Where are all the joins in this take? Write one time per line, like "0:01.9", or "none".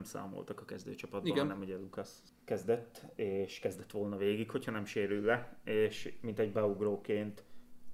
none

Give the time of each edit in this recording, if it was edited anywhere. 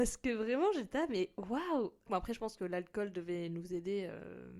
0:02.1

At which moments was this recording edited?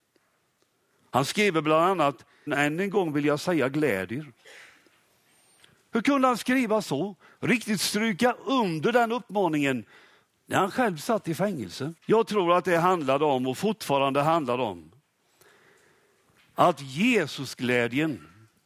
0:02.5
0:07.3
0:12.0

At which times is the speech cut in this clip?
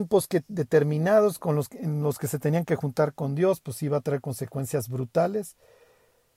none

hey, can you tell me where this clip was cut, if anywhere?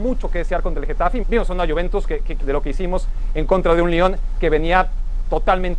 0:01.2
0:02.4

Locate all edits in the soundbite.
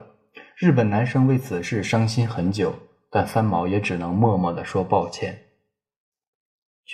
none

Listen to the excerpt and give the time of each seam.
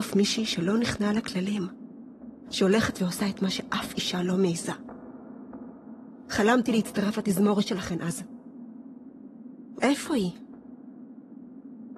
0:09.8

